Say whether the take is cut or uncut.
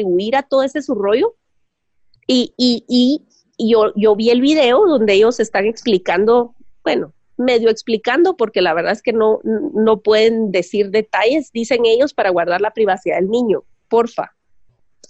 uncut